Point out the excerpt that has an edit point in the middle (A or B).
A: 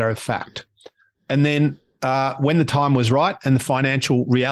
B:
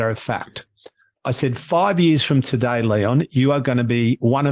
A